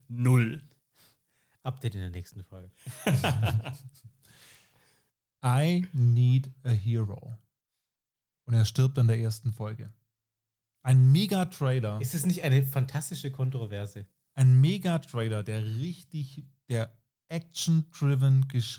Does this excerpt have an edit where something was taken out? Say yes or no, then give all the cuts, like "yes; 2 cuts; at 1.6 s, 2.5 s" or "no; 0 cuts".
no; 0 cuts